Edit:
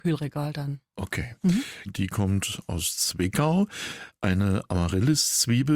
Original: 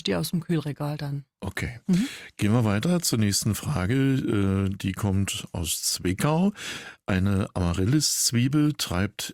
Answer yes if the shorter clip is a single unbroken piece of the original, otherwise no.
no